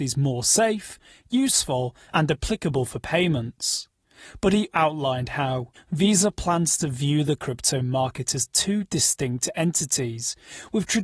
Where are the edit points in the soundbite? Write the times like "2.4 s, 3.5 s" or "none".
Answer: 4.7 s, 5.8 s